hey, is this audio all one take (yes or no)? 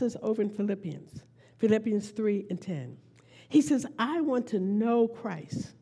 yes